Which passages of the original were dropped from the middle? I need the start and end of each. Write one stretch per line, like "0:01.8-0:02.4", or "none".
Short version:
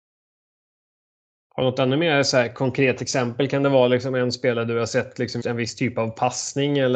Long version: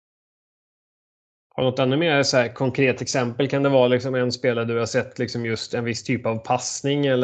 0:05.4-0:05.7